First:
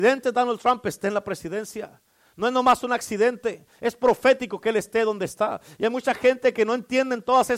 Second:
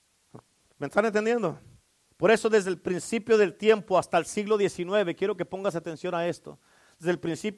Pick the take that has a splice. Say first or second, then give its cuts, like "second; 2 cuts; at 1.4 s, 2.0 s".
second; 1 cut; at 2.1 s